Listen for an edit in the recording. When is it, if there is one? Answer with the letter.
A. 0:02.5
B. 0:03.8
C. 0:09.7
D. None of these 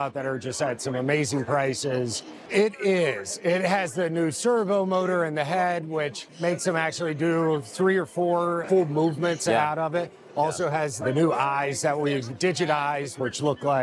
A